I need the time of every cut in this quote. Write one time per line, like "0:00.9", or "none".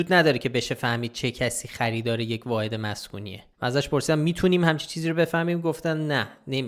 0:03.5